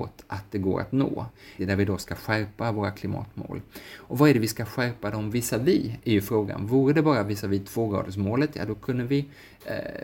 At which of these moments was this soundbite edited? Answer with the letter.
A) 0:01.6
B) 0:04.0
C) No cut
A